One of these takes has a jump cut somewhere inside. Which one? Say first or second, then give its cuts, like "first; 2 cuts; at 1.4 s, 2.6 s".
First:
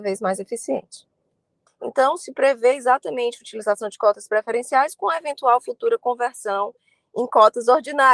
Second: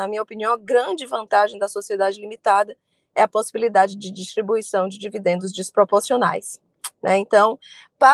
first; 1 cut; at 1.7 s